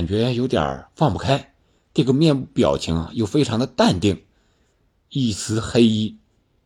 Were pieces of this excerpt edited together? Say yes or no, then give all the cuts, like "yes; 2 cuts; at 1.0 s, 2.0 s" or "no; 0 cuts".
yes; 2 cuts; at 1.8 s, 4.9 s